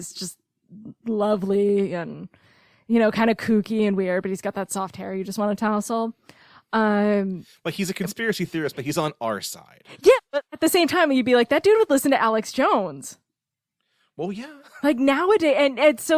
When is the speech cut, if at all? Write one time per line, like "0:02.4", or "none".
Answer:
none